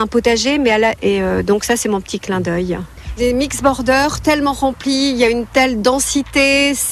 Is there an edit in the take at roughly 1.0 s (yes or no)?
yes